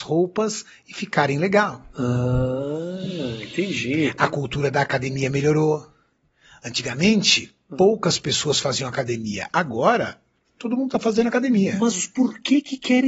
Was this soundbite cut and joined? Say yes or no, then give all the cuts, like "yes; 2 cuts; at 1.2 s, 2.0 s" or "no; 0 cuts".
no; 0 cuts